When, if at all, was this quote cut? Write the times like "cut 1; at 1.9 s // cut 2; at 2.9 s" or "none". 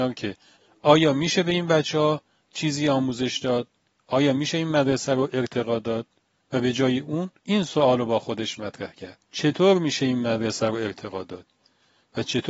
cut 1; at 7.4 s // cut 2; at 9.2 s